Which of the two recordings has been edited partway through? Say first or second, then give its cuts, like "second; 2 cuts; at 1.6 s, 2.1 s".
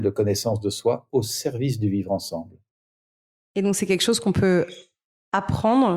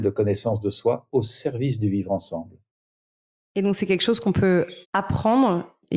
second; 1 cut; at 4.8 s